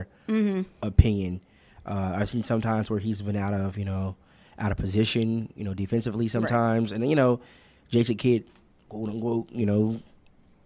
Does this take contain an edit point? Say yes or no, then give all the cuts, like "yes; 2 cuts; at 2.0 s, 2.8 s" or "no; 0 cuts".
no; 0 cuts